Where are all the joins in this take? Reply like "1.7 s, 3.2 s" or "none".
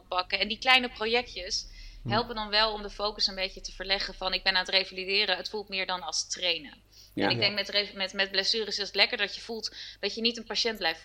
none